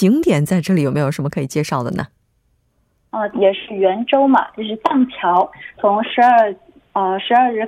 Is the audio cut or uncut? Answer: cut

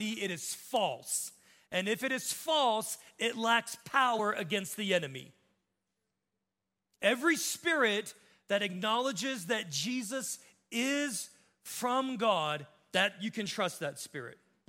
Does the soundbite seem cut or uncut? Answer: uncut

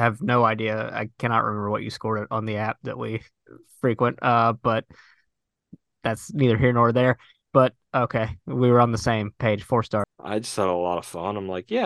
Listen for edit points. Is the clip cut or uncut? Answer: cut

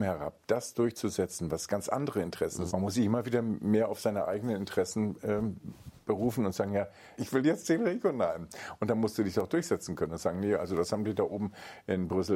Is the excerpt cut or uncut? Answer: cut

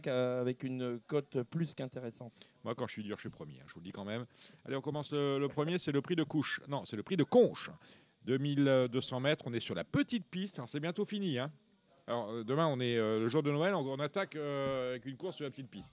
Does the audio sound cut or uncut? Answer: uncut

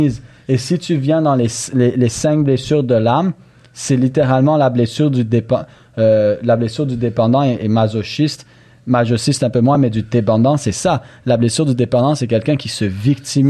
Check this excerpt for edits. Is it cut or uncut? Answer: uncut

